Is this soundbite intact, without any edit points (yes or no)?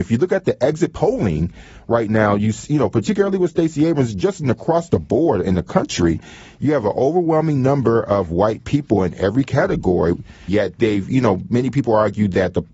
no